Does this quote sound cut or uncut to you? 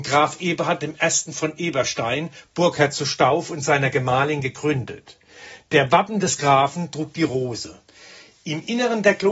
uncut